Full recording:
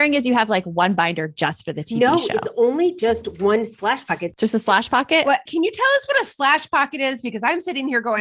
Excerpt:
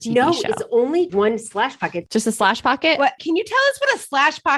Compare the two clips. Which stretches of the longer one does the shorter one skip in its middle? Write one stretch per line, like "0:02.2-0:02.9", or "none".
0:02.9-0:03.4